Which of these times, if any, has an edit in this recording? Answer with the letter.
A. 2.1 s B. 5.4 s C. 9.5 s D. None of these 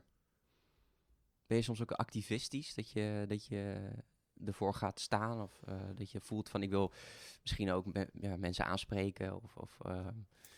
D